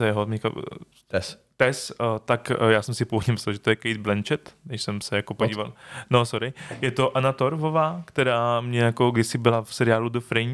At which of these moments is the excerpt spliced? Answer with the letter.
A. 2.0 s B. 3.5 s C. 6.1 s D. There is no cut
D